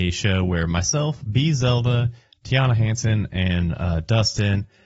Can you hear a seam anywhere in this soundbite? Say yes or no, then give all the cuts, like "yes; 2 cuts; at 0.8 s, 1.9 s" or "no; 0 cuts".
no; 0 cuts